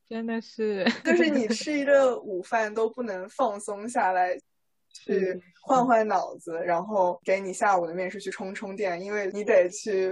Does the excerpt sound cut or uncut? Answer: uncut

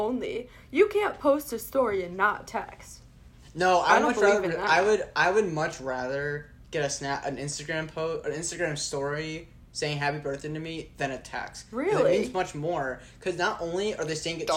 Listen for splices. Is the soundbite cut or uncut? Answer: uncut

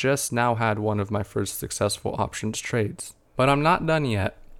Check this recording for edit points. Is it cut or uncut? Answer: cut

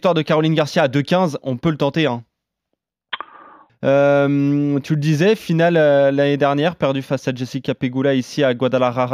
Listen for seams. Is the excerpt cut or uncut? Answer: cut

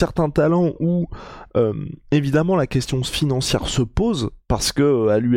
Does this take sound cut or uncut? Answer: uncut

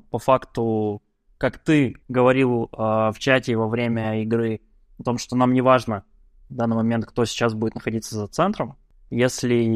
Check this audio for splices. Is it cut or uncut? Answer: cut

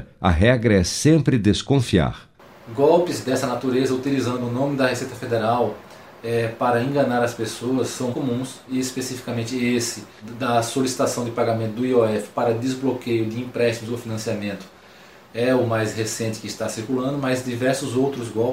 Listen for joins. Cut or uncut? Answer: cut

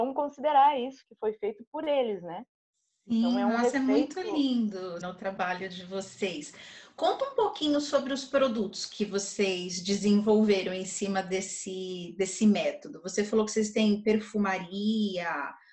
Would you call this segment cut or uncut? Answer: cut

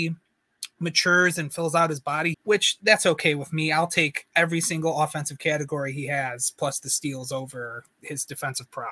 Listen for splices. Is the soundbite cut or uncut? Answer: cut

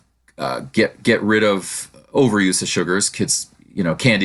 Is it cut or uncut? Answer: uncut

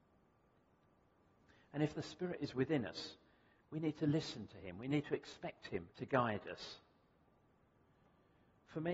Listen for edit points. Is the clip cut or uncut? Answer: cut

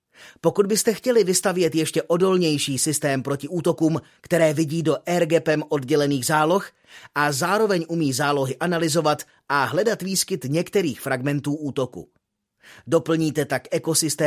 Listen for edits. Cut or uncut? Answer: cut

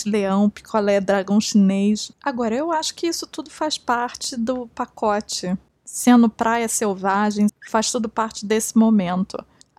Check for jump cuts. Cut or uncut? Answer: cut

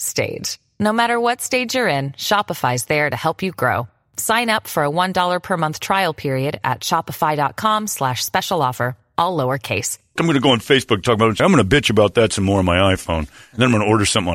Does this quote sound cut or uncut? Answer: cut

